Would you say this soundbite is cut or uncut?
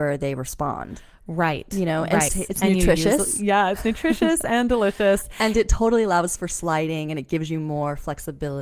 cut